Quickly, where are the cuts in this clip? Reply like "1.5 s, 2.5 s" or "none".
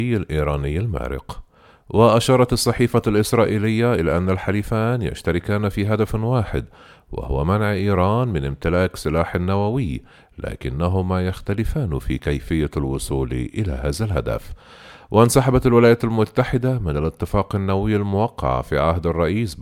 none

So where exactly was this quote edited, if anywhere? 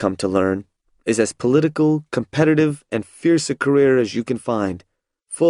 none

